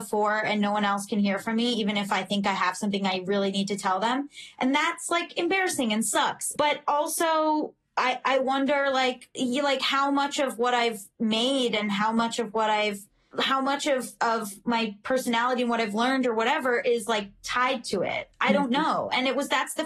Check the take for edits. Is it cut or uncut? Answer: uncut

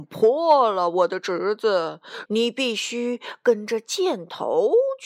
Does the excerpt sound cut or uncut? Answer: cut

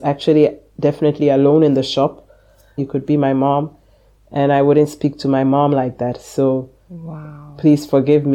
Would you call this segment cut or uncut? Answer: cut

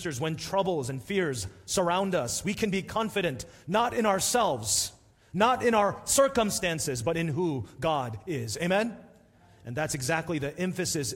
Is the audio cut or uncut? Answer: uncut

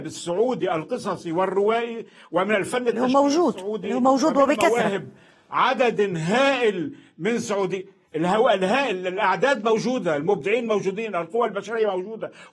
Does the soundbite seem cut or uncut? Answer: cut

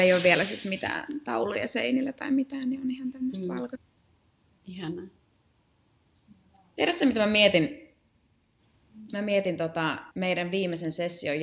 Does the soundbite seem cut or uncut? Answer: cut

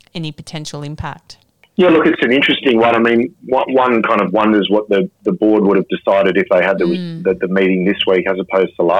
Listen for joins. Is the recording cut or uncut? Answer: uncut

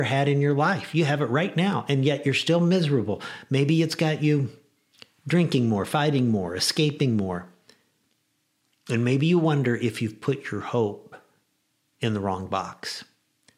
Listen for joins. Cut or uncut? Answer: uncut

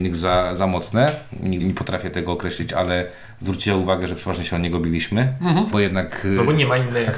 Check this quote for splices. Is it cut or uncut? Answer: cut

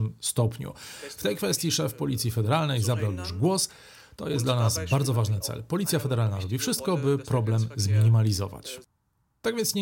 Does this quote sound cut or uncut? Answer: uncut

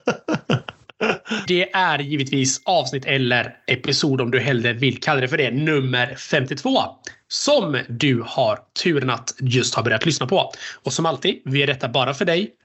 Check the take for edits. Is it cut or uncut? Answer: cut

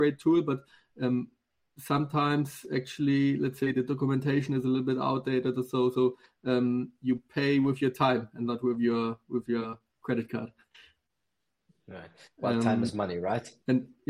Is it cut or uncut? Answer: uncut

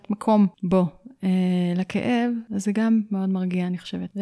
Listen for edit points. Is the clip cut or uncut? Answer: uncut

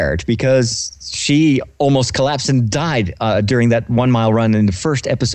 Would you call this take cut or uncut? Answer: uncut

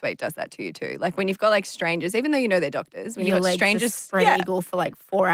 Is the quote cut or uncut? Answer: uncut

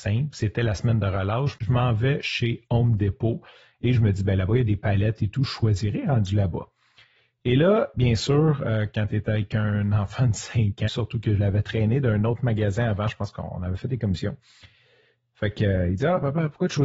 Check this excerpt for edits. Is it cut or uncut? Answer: cut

